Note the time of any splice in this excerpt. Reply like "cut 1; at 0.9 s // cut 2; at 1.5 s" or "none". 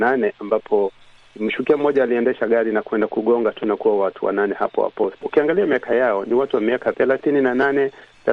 cut 1; at 5.2 s // cut 2; at 6.9 s